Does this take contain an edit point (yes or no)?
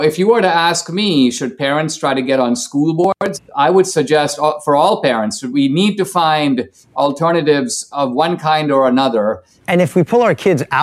yes